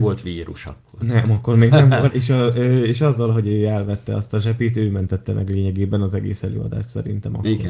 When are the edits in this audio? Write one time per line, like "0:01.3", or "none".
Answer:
0:02.1